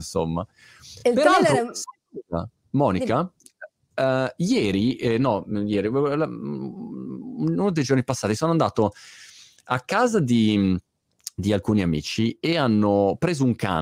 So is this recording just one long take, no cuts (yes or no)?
yes